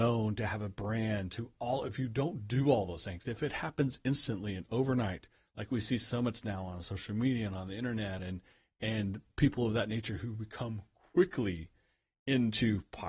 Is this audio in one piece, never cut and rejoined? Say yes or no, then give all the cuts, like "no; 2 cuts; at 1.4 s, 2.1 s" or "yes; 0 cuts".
yes; 0 cuts